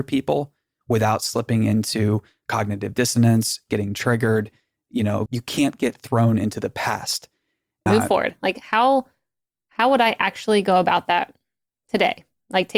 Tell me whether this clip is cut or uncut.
cut